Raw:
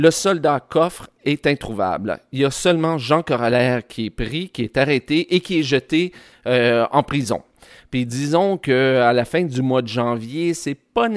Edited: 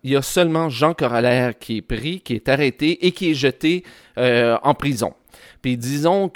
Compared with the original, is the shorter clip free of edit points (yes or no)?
yes